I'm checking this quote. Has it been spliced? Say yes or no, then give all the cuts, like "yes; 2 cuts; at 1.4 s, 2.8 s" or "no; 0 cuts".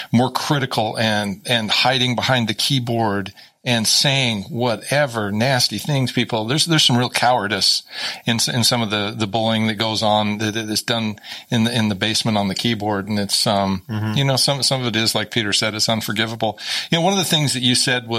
no; 0 cuts